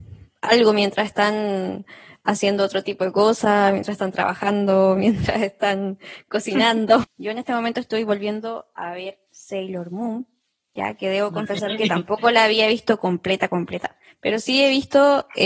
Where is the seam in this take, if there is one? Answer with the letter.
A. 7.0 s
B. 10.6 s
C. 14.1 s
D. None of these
A